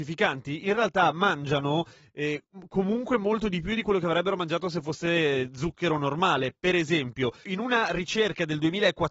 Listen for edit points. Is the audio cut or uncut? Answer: uncut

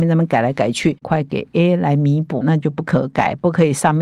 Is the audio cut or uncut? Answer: cut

